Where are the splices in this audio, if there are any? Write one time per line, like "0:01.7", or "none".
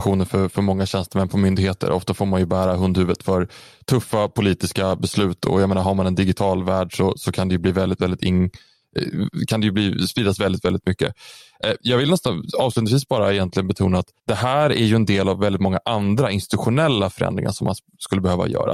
0:14.2

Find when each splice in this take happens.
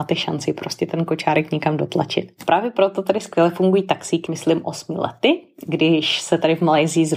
0:04.3

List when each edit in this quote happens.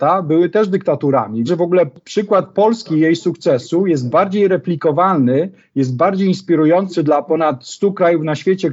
0:01.5

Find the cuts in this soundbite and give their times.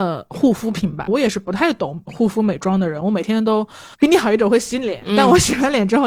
0:01.1
0:03.9

